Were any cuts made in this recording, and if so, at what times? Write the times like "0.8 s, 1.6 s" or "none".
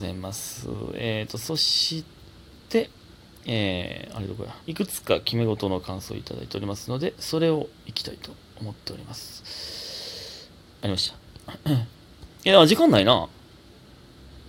4.6 s